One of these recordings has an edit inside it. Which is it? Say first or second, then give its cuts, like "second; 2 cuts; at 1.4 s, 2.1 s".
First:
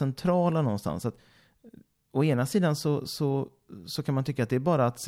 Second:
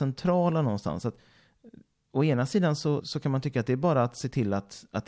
second; 1 cut; at 3.0 s